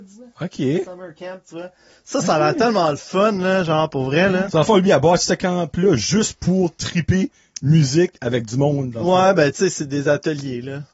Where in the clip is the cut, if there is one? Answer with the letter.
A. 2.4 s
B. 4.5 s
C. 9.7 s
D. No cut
B